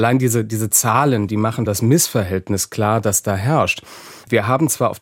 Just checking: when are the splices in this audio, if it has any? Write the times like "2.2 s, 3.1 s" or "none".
1.7 s